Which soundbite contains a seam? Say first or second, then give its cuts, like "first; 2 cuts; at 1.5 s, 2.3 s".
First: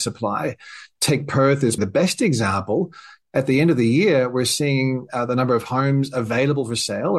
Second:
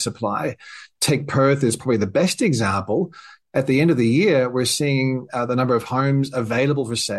first; 1 cut; at 1.8 s